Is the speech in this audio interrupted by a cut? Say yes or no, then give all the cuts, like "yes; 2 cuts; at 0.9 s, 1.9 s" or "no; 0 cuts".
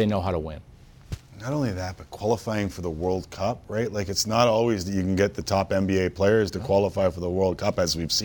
no; 0 cuts